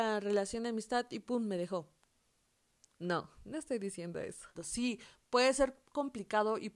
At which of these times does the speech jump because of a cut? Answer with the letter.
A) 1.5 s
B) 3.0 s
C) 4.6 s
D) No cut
C